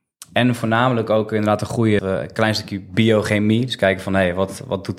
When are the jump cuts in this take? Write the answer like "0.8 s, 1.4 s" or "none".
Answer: 2.0 s